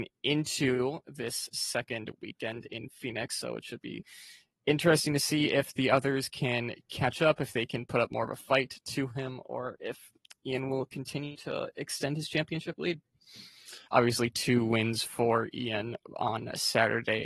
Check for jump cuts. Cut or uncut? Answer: cut